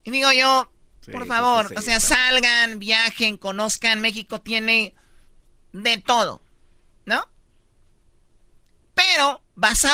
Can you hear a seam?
no; 0 cuts

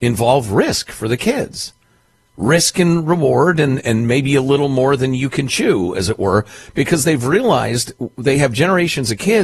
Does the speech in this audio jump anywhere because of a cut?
no; 0 cuts

